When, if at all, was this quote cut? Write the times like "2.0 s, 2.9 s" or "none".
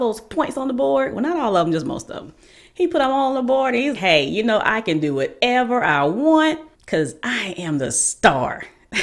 4.0 s, 6.7 s